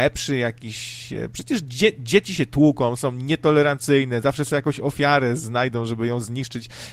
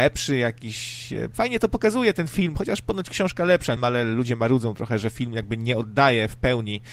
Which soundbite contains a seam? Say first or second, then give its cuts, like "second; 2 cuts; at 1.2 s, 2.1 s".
second; 2 cuts; at 1.3 s, 3.8 s